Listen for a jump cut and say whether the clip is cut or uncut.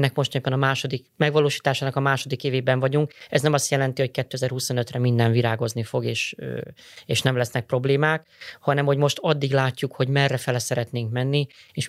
uncut